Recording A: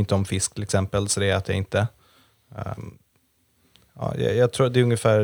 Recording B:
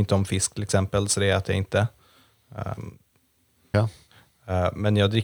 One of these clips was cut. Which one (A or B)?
B